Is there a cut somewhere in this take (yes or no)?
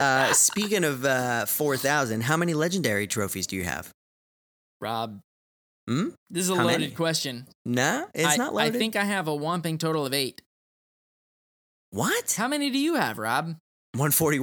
no